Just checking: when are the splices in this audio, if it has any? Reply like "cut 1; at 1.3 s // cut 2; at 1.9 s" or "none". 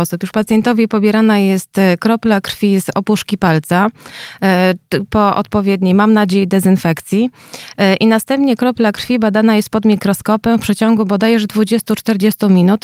none